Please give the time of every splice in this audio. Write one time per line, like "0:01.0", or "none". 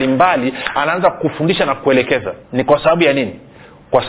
0:02.4